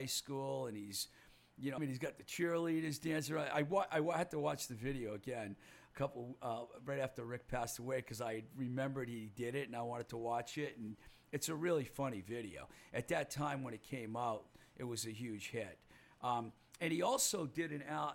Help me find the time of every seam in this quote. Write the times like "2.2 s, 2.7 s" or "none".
1.8 s